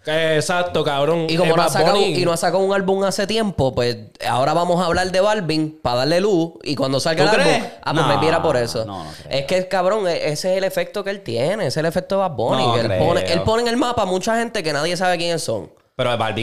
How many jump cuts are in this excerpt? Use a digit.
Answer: 0